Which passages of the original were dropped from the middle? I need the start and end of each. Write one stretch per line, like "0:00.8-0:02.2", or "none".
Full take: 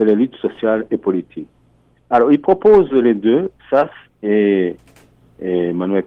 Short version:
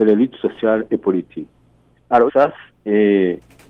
0:02.3-0:03.6